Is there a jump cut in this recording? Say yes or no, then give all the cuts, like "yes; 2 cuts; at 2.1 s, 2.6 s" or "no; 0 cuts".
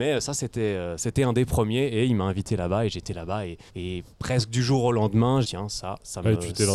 yes; 2 cuts; at 3.7 s, 5.4 s